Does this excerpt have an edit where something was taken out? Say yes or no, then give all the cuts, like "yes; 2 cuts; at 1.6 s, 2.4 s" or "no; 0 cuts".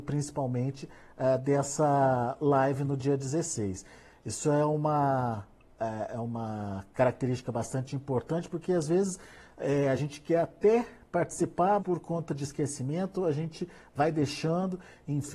yes; 1 cut; at 11.8 s